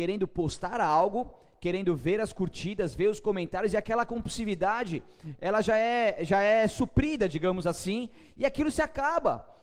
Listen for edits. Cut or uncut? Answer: uncut